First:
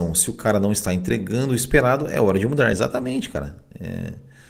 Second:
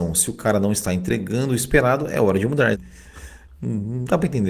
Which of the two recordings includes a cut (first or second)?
second